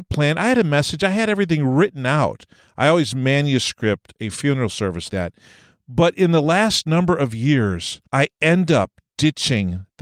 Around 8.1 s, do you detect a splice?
yes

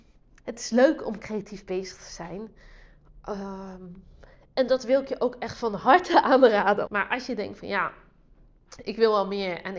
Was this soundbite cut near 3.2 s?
no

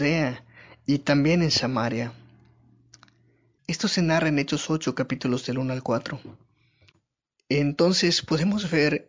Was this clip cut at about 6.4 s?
no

